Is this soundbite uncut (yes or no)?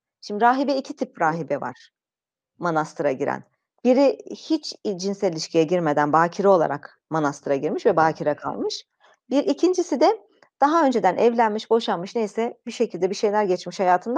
yes